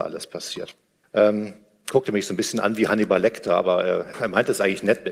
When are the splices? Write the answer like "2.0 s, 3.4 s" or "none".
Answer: 1.0 s, 4.1 s

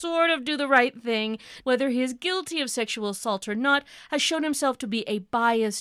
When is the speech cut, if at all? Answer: 1.6 s

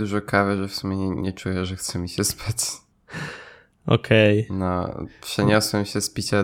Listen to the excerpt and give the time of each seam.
2.9 s

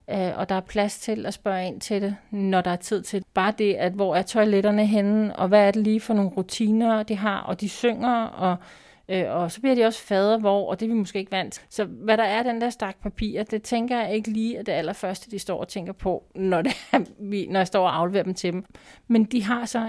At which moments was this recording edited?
3.2 s, 11.6 s

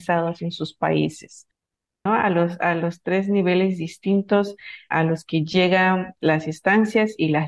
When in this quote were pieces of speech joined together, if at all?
2.1 s

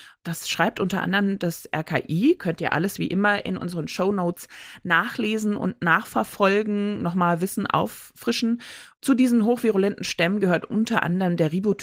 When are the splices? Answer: none

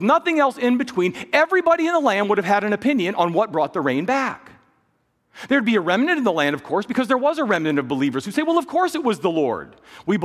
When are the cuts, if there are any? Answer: none

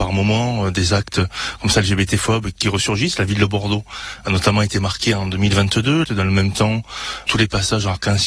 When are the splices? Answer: 6.0 s

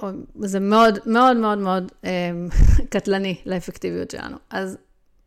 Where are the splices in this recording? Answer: none

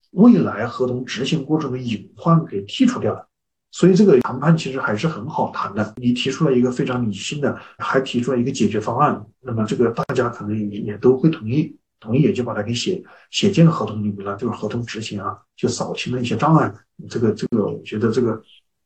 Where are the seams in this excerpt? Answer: 7.8 s, 9.3 s, 14.4 s

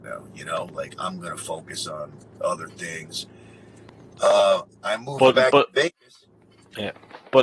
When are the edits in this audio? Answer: 0.9 s, 4.7 s

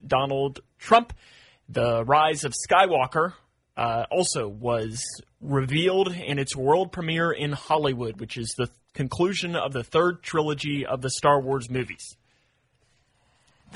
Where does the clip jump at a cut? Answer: none

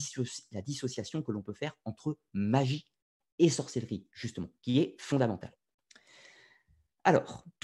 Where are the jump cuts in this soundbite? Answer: none

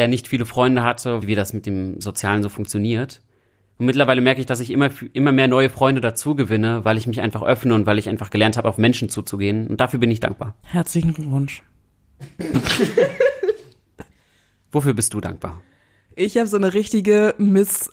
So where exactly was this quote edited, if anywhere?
1.2 s

